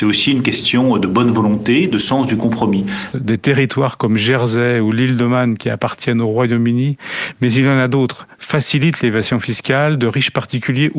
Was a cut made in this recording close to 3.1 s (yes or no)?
yes